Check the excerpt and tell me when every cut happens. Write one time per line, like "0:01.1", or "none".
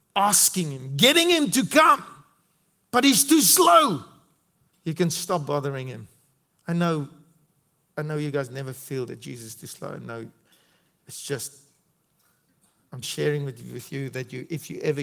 0:04.7
0:06.5
0:13.0